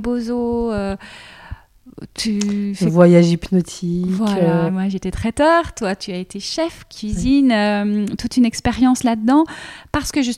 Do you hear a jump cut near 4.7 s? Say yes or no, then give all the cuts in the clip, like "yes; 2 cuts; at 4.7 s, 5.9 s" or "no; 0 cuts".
yes; 1 cut; at 4.7 s